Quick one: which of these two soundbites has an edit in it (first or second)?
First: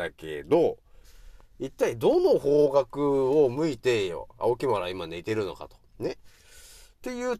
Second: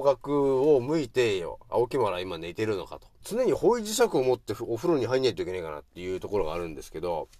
second